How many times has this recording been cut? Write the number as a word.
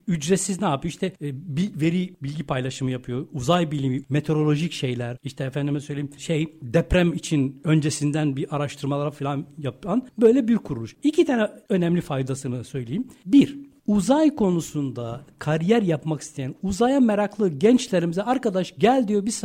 two